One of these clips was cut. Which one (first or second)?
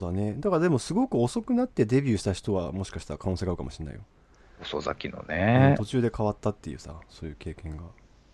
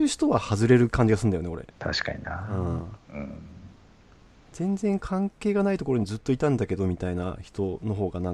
second